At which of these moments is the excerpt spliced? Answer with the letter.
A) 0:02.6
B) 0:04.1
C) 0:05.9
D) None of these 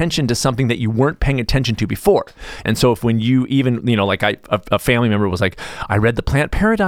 A